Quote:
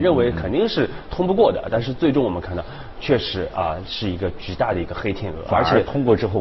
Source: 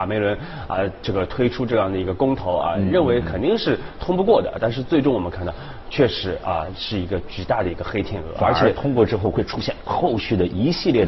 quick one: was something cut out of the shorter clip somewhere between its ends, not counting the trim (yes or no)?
no